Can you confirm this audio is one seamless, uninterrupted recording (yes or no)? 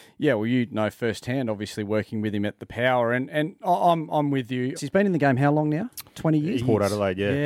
no